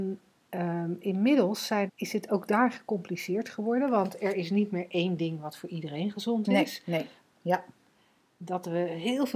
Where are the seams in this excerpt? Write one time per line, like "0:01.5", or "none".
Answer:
0:01.9
0:07.2